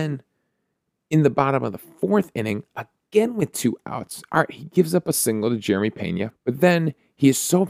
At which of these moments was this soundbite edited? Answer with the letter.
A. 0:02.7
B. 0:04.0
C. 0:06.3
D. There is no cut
C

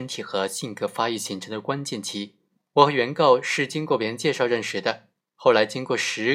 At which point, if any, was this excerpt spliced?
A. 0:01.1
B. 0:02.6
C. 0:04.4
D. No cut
B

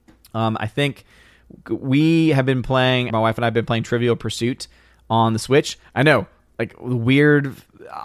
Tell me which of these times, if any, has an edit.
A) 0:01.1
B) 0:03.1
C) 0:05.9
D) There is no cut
B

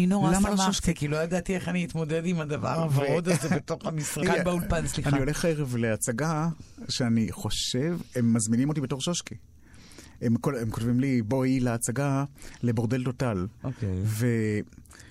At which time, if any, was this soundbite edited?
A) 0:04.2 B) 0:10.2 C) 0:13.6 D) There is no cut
A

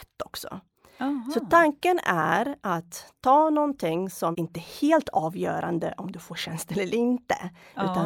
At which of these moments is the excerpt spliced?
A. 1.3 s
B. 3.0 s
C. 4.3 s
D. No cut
C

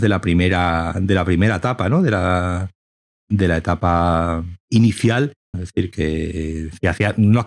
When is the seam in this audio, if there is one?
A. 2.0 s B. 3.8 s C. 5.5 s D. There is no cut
C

